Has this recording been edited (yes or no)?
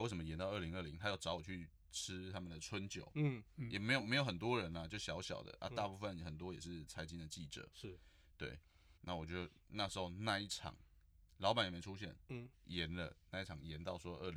yes